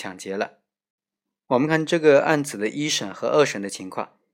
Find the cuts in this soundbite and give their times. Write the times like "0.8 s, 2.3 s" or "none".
1.7 s